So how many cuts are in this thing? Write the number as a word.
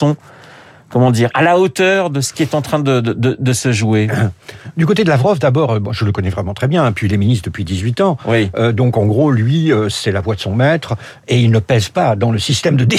zero